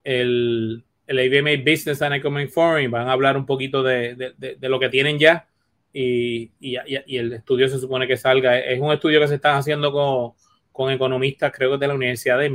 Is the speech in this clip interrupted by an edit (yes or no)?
no